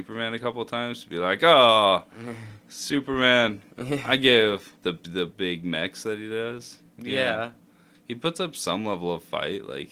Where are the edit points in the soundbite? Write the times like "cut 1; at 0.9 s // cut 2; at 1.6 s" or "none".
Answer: cut 1; at 3.7 s // cut 2; at 4.7 s